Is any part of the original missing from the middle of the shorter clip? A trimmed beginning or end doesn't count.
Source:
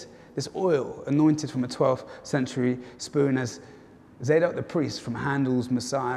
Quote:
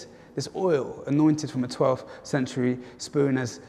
no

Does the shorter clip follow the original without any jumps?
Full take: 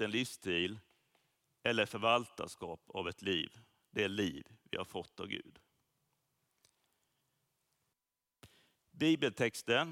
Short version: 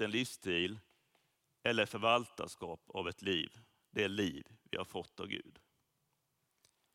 yes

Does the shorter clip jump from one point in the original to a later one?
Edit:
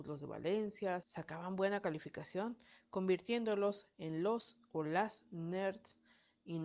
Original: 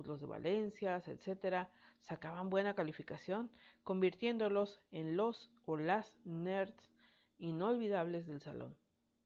yes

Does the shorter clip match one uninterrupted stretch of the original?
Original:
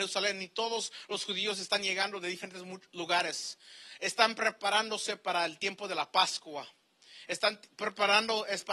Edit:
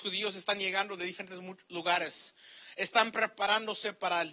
yes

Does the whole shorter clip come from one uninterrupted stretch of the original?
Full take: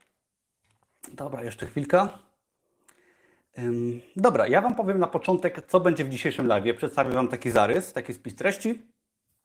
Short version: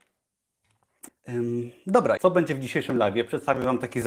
no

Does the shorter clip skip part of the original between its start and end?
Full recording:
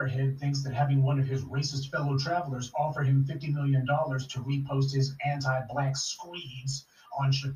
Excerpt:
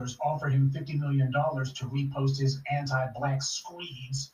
no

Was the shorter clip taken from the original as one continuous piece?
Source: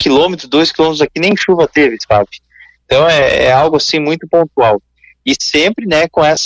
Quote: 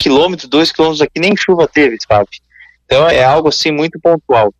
no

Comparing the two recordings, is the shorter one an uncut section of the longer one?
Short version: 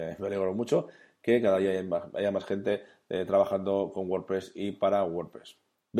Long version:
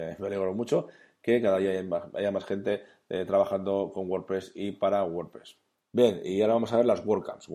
yes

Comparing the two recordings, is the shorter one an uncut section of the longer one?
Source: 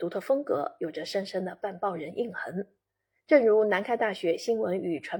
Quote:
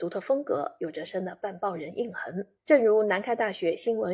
no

